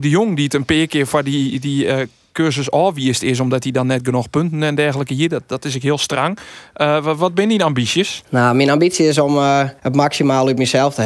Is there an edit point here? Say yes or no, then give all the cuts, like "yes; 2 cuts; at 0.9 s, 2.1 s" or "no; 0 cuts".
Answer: yes; 1 cut; at 9.8 s